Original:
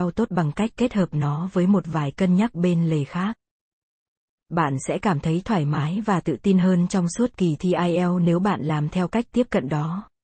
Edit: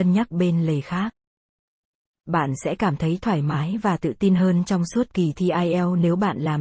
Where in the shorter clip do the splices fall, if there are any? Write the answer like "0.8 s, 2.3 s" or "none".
none